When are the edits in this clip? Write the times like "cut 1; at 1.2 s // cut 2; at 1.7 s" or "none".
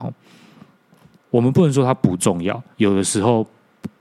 cut 1; at 1.2 s // cut 2; at 2.7 s